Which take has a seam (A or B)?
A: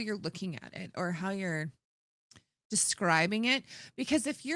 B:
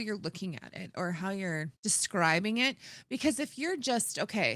B